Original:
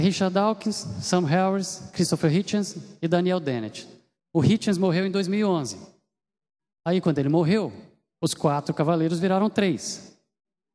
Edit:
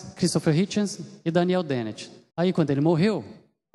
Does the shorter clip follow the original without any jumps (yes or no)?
no